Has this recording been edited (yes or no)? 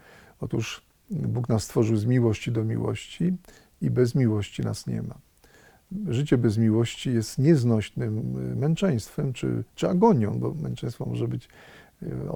no